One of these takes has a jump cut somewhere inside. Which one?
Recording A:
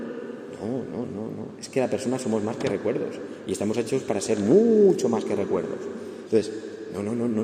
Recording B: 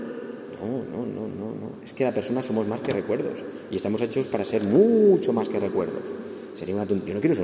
A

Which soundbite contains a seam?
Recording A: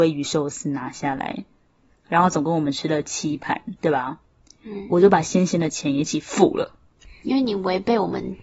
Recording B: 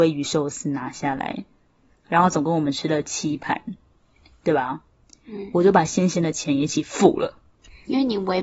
A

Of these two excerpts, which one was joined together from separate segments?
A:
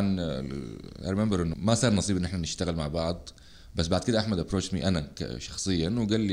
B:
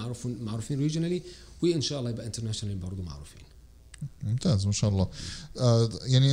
A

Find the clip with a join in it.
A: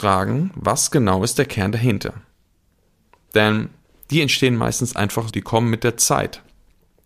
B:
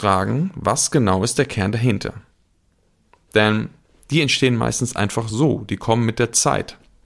A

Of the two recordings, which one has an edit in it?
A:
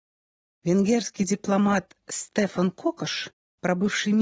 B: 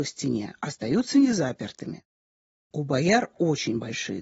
B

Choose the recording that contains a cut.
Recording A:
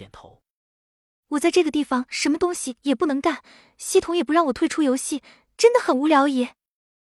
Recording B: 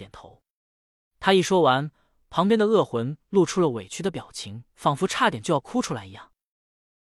B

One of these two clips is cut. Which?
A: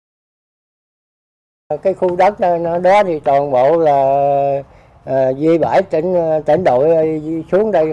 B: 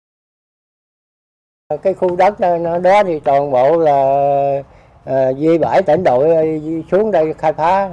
B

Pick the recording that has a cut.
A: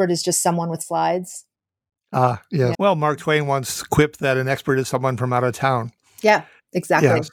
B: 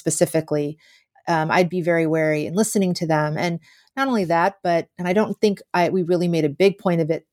A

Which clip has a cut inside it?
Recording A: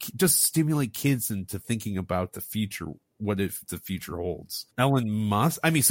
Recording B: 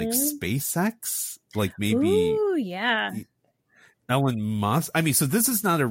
A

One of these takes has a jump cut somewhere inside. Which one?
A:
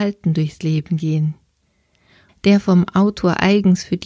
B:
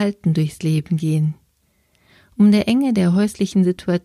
A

